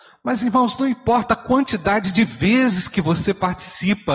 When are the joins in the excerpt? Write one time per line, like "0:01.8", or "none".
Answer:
none